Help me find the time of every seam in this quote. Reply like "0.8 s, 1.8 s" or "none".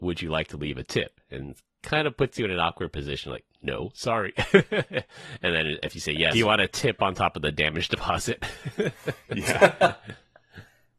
6.3 s